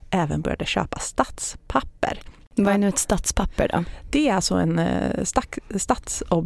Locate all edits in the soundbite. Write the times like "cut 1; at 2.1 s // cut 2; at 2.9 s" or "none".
none